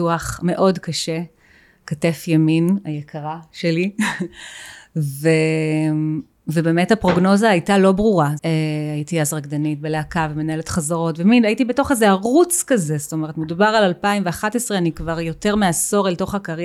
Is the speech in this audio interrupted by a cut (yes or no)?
yes